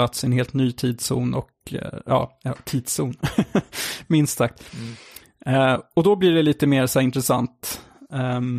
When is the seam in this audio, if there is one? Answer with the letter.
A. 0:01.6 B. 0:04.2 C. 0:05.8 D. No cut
D